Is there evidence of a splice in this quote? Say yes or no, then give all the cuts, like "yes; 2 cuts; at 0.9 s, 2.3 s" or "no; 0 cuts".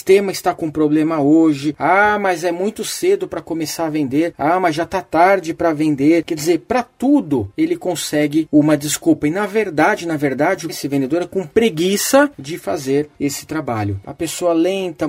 yes; 2 cuts; at 10.7 s, 14.0 s